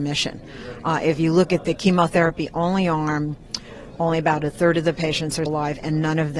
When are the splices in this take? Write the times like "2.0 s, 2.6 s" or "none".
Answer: 4.0 s, 5.5 s